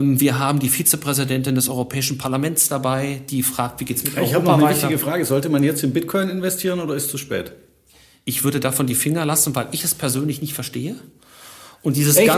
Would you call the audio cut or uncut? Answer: uncut